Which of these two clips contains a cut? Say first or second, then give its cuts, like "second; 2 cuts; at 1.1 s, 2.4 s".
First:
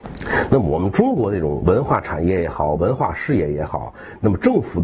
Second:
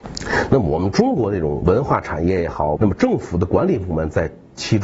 second; 1 cut; at 2.8 s